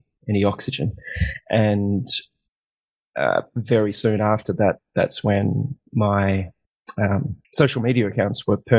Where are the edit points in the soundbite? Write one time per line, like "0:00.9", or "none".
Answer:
0:07.4